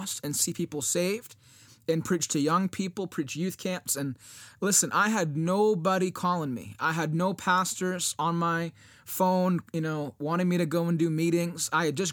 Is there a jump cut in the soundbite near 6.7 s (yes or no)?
no